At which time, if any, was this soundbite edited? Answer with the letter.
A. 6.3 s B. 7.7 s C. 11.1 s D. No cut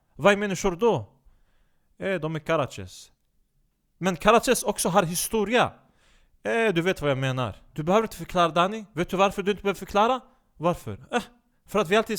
B